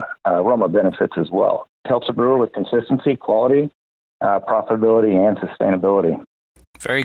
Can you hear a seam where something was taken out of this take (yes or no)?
yes